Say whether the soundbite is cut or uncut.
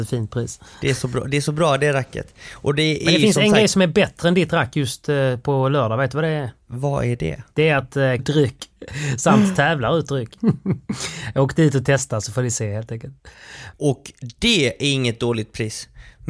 cut